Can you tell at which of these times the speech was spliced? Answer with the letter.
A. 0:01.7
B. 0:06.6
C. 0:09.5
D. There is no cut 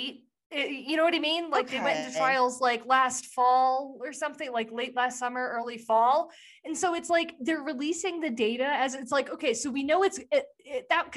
D